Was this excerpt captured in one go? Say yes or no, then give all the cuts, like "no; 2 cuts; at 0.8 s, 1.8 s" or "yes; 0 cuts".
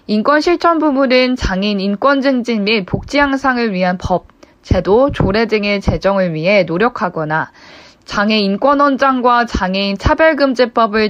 yes; 0 cuts